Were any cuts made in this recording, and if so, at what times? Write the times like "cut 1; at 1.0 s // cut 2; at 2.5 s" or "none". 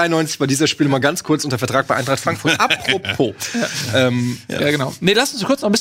none